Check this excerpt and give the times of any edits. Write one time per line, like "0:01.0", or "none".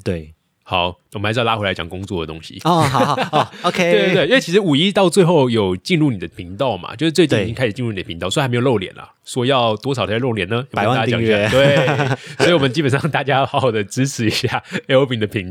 none